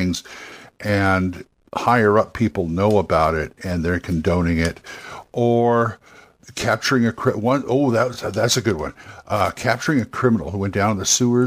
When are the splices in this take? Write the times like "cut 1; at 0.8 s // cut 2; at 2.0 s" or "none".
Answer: none